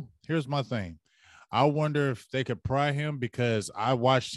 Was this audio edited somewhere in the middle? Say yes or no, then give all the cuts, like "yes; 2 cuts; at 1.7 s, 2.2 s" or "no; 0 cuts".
no; 0 cuts